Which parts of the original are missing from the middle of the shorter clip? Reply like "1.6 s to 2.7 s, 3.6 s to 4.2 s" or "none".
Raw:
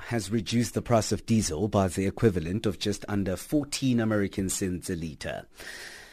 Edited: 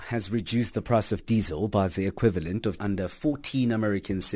2.8 s to 3.1 s